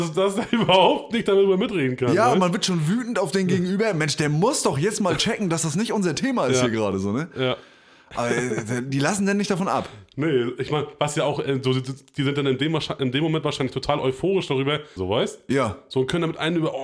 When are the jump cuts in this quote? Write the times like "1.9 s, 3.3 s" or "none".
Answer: 15.0 s